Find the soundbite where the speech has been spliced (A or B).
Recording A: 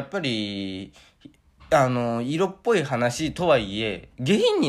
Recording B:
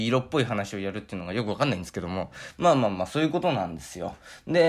B